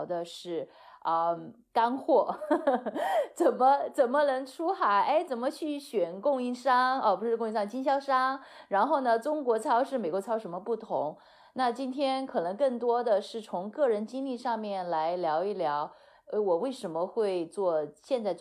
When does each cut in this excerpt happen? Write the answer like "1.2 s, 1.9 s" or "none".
none